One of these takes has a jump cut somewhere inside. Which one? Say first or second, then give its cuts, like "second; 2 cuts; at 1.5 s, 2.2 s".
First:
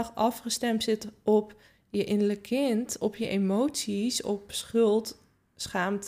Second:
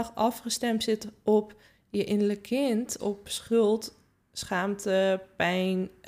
second; 1 cut; at 3.0 s